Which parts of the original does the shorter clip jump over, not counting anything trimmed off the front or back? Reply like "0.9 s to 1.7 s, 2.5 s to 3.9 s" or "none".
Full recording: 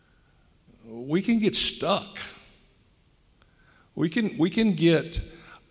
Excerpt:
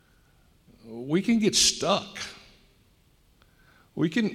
none

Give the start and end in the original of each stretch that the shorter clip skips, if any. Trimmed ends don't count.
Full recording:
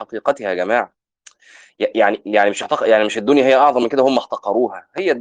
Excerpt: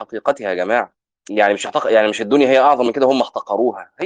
1.3 s to 2.2 s

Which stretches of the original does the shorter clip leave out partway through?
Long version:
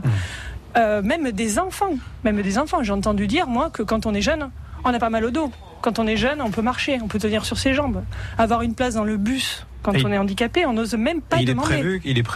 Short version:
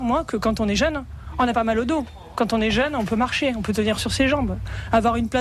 none

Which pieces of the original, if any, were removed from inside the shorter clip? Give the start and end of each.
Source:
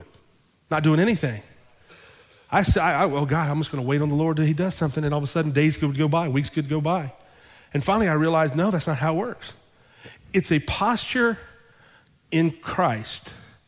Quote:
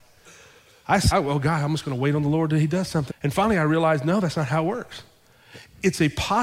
2.7 s to 3.0 s, 5.0 s to 7.6 s

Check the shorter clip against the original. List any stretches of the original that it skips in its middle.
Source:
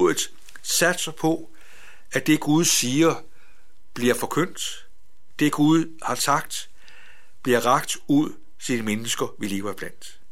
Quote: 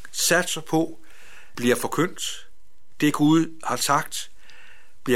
2.1 s to 3.9 s

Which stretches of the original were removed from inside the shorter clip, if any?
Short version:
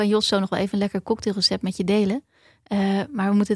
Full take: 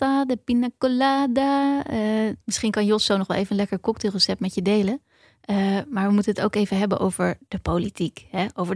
none

